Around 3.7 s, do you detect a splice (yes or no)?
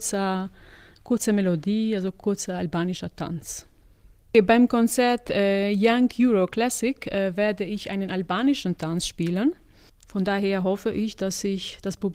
no